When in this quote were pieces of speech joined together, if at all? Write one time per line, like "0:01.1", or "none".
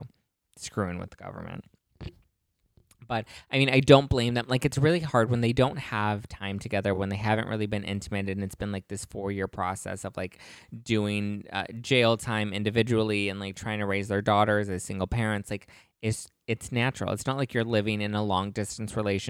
none